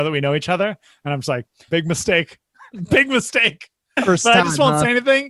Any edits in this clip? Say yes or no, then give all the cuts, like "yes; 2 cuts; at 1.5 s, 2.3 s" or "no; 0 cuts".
yes; 1 cut; at 1.7 s